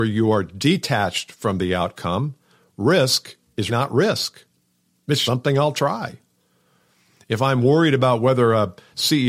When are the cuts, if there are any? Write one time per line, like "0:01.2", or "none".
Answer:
0:03.7
0:05.3